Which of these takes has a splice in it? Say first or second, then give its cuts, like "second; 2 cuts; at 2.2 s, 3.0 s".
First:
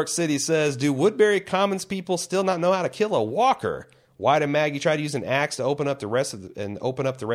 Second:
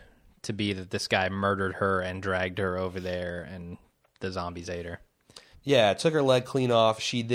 second; 1 cut; at 5.5 s